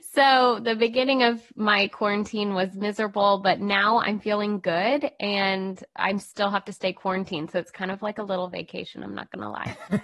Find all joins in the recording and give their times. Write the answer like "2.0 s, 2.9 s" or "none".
none